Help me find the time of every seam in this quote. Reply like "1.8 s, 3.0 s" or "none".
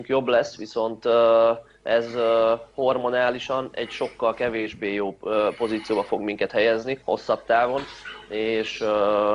7.0 s